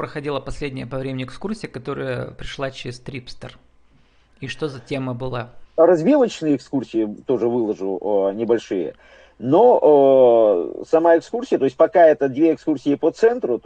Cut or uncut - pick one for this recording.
cut